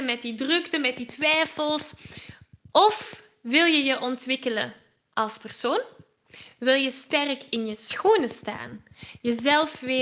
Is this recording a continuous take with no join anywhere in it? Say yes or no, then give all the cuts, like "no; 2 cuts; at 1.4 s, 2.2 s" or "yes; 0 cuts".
yes; 0 cuts